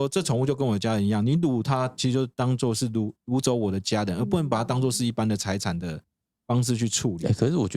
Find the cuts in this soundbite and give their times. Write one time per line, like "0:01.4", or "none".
none